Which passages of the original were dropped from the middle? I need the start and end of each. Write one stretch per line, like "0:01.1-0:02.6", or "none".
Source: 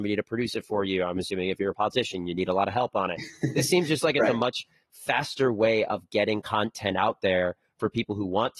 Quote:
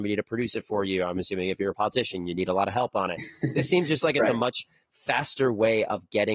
none